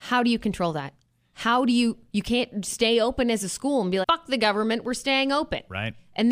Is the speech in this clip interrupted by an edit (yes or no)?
yes